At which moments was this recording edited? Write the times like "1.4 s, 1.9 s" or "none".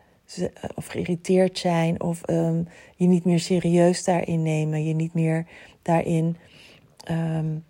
none